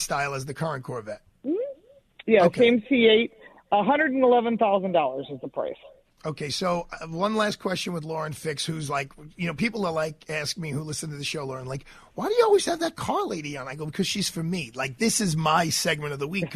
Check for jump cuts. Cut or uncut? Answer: uncut